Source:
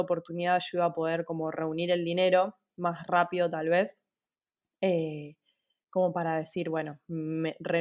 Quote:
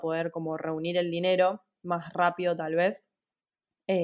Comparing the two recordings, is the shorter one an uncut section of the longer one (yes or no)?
yes